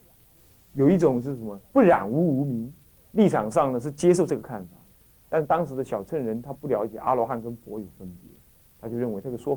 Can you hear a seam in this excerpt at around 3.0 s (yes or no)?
yes